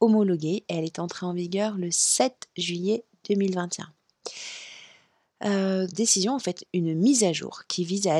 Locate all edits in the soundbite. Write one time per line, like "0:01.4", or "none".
0:05.9

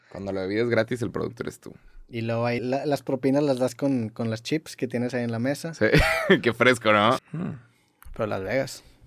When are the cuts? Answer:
0:02.6
0:07.2

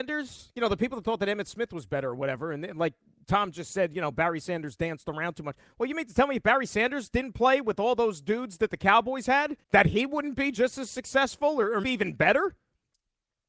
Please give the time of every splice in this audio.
0:09.6
0:11.8

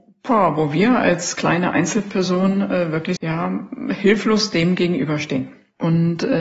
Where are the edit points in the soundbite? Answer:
0:03.2

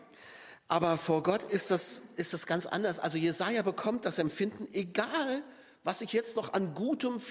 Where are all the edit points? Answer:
none

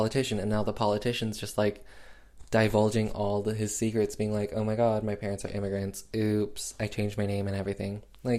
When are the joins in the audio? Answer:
none

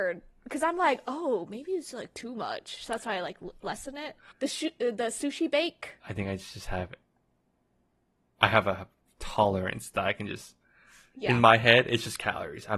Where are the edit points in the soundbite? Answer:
0:04.3
0:06.0

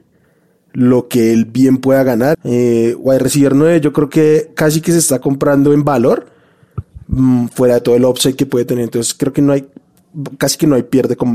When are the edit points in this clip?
0:02.3

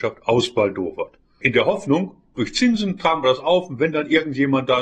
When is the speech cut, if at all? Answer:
0:01.4

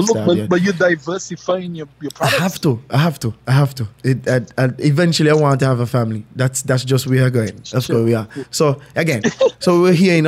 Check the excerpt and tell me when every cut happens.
0:07.6

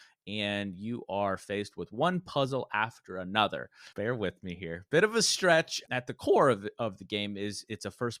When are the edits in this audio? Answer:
0:03.9
0:05.9

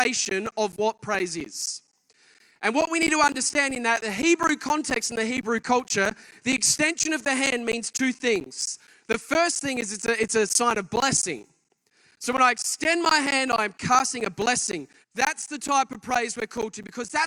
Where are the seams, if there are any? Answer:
0:15.0

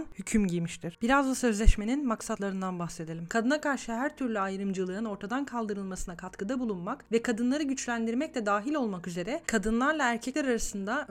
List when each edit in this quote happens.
0:01.0
0:03.3

